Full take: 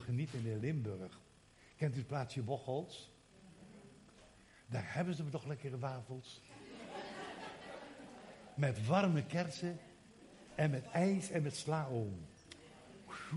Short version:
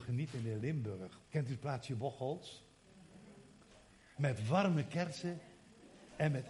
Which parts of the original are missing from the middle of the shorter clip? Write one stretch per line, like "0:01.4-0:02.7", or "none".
0:01.2-0:01.7
0:04.6-0:08.5